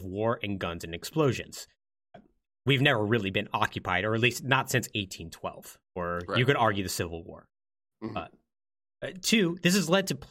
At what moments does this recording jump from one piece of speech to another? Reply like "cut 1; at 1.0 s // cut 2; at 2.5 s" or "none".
none